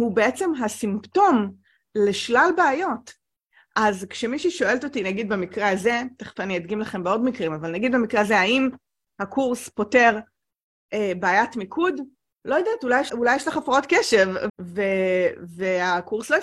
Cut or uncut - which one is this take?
cut